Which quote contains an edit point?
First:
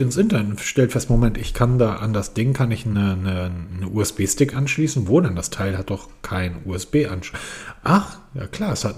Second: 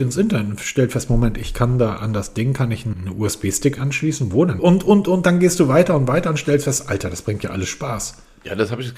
second; 2 cuts; at 2.9 s, 4.6 s

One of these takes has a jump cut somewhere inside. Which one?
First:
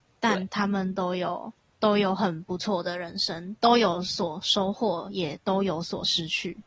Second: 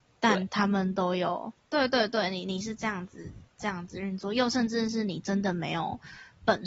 second; 1 cut; at 1.6 s

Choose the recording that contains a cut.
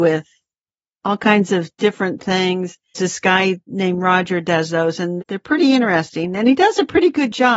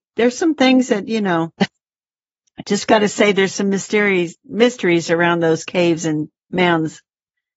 first; 2 cuts; at 2.9 s, 5.2 s

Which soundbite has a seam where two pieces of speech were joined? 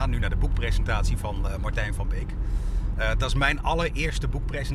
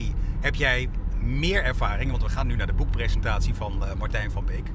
second; 1 cut; at 1.1 s

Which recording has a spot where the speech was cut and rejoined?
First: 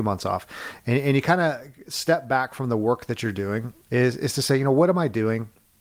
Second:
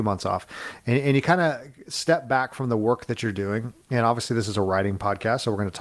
first; 1 cut; at 3.9 s

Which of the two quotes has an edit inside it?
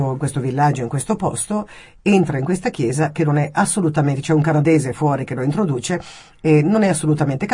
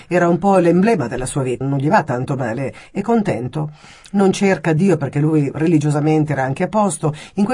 second; 1 cut; at 1.6 s

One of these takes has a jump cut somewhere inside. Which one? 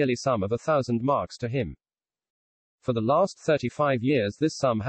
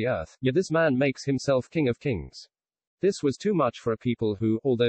second; 1 cut; at 2.9 s

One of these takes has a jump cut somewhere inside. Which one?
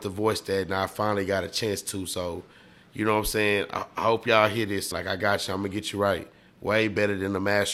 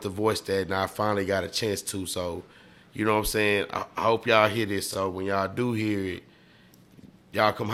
first; 1 cut; at 4.9 s

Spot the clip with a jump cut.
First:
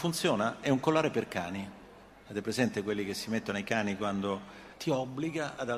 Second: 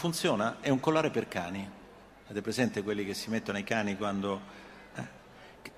first; 1 cut; at 4.7 s

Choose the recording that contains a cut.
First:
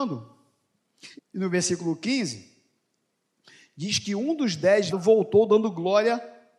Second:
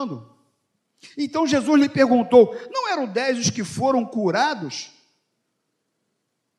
first; 2 cuts; at 1.2 s, 4.9 s

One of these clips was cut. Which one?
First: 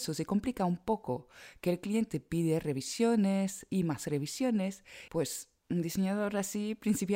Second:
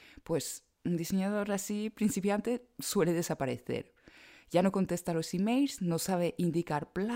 first; 1 cut; at 5.1 s

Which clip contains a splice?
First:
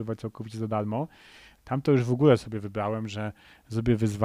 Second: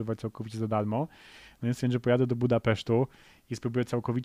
first; 1 cut; at 1.6 s

